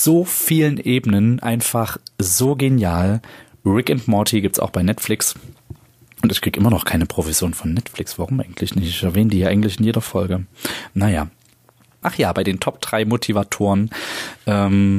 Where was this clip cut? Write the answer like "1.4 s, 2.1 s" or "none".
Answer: 12.0 s